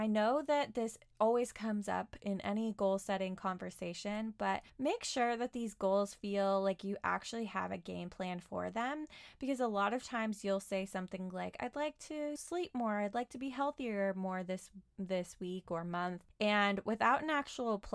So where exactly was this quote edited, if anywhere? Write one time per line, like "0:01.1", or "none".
0:12.4